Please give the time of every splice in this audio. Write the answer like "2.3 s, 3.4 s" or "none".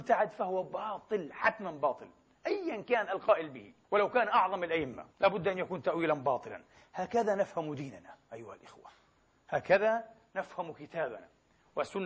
3.8 s, 5.1 s